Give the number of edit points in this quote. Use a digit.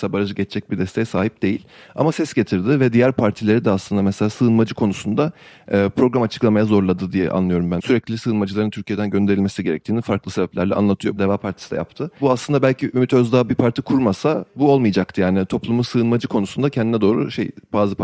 2